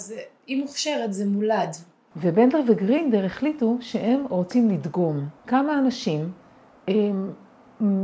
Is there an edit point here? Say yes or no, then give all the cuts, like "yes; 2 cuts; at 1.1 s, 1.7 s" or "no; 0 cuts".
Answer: yes; 2 cuts; at 2.1 s, 5.4 s